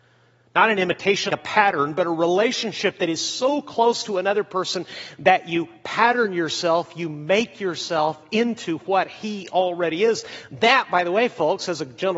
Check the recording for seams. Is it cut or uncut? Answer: cut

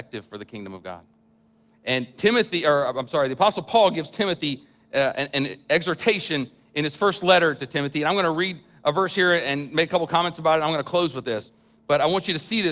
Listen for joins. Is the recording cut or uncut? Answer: uncut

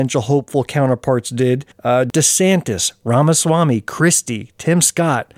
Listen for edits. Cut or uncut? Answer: uncut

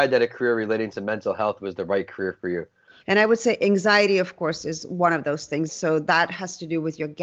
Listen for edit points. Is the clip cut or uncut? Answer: cut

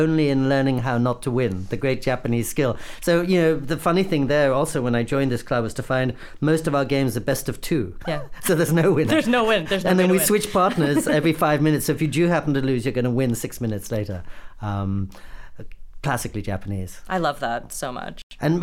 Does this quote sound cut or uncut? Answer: uncut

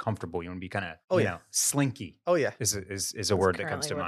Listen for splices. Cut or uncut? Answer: cut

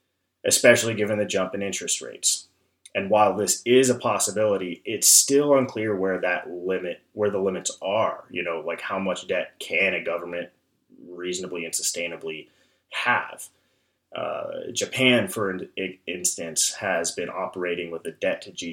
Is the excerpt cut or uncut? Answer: uncut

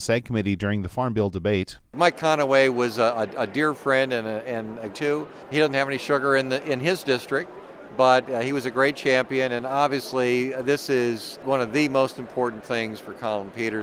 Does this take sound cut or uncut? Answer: cut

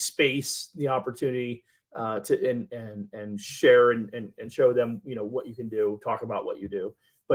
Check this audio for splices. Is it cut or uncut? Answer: uncut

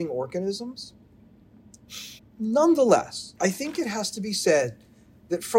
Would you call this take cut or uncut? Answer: cut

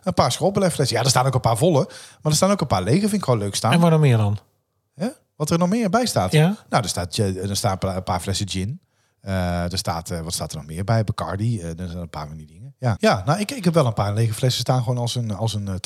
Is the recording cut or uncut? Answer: cut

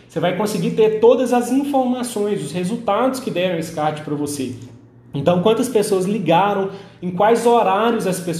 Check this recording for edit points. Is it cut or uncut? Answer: uncut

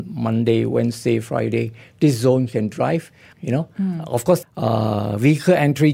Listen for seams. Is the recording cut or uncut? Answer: cut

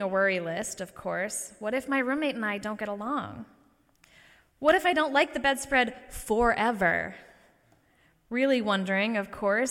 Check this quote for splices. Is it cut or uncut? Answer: uncut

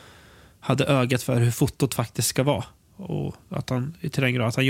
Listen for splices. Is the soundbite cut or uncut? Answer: uncut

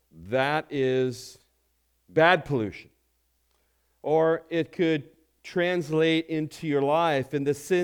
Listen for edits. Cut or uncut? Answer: uncut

